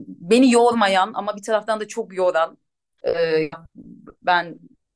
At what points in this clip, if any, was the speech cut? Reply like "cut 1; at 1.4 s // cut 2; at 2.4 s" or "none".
cut 1; at 3.0 s